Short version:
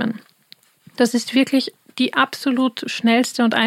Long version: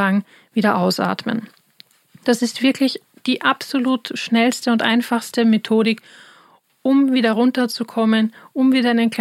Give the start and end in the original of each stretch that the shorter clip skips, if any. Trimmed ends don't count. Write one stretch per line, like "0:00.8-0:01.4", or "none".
none